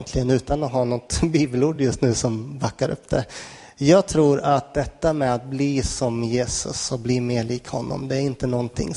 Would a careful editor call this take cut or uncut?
uncut